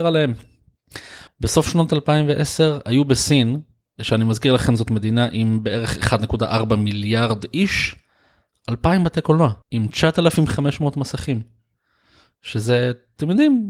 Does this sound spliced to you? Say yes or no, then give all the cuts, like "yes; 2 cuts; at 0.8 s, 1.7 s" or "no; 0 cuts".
yes; 2 cuts; at 1.3 s, 9.6 s